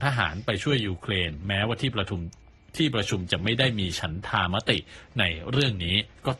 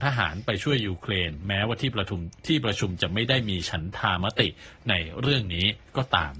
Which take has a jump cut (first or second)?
second